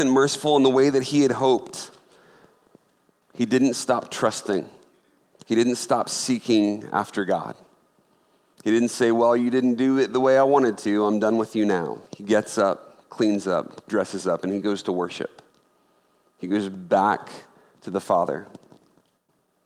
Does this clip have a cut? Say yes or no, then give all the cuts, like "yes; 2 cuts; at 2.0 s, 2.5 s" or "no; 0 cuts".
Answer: yes; 1 cut; at 12.1 s